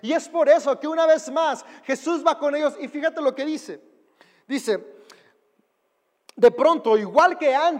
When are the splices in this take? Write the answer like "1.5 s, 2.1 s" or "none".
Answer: none